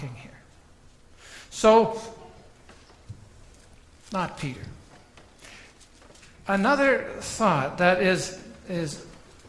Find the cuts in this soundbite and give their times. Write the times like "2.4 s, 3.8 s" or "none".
none